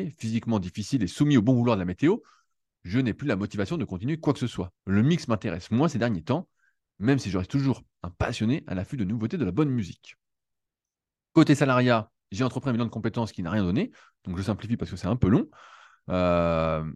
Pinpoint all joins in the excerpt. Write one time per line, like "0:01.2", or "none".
0:04.8